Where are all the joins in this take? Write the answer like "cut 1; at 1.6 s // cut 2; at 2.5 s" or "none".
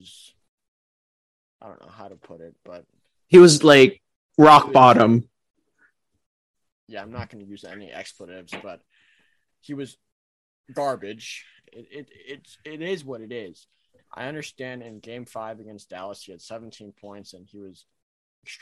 cut 1; at 11.6 s // cut 2; at 14.0 s